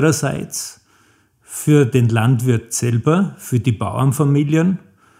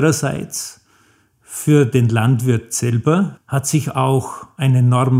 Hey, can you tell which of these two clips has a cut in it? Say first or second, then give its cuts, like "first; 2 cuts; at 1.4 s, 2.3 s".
second; 1 cut; at 3.4 s